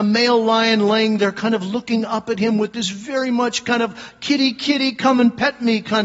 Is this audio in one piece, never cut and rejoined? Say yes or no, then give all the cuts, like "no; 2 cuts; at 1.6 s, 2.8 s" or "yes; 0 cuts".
yes; 0 cuts